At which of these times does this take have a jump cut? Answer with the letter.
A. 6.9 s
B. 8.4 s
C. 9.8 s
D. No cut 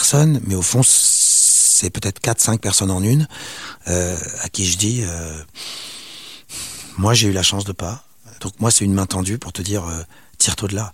B